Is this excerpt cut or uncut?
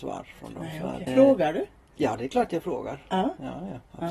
cut